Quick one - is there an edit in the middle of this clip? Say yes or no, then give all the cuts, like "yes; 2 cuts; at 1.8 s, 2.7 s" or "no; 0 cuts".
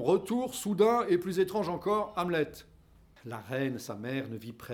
yes; 1 cut; at 3.2 s